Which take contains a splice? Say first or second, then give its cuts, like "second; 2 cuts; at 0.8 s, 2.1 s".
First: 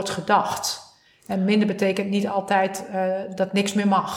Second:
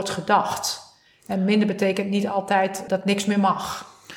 second; 1 cut; at 2.9 s